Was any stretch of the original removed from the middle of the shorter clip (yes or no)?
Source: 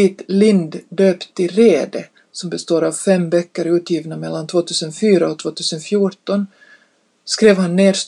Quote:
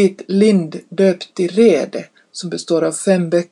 no